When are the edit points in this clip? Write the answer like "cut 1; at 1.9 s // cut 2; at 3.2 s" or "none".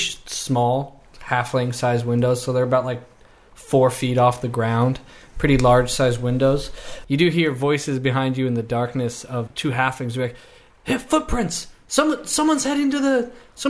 cut 1; at 9.5 s